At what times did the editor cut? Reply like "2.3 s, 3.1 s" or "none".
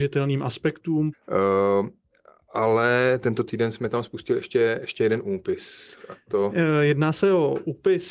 1.1 s